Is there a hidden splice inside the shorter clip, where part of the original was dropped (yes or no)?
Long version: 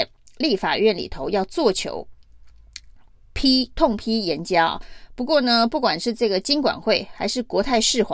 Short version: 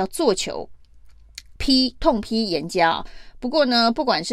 yes